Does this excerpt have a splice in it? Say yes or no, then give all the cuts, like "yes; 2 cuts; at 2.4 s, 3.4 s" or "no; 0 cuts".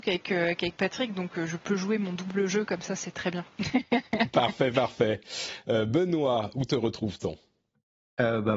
no; 0 cuts